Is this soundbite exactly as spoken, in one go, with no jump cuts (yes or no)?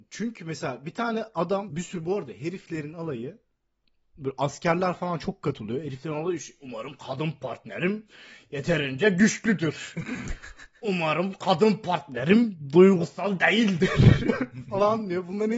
no